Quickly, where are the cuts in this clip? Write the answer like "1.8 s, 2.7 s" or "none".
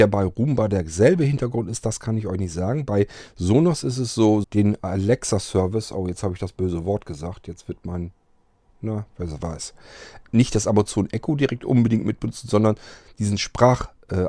4.4 s, 10.2 s